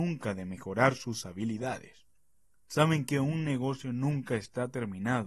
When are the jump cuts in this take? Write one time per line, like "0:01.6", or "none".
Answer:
none